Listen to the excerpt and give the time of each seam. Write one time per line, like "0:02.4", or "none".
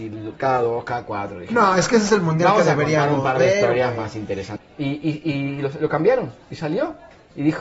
0:04.6